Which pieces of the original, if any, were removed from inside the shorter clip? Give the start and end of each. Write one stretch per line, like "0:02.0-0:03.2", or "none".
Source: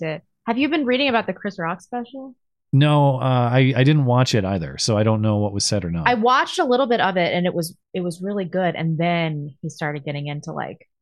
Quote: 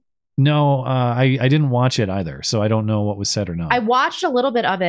none